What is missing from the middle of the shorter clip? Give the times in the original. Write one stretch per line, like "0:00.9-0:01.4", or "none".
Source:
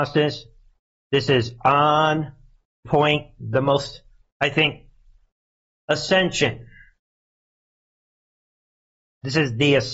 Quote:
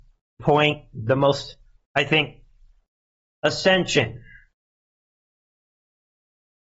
none